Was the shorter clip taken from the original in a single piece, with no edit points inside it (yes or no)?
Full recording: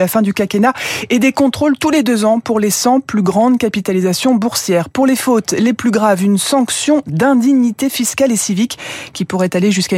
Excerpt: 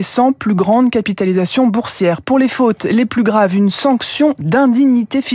yes